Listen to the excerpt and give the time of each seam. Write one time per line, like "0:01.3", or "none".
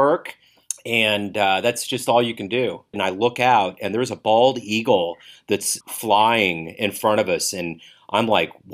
0:02.9
0:05.8